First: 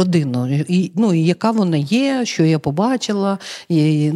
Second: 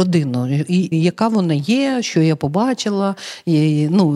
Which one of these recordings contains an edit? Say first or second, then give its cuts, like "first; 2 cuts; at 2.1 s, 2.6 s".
second; 1 cut; at 0.9 s